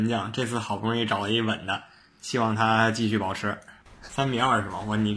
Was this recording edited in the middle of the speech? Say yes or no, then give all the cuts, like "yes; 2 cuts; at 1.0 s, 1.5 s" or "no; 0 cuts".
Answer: yes; 1 cut; at 4.0 s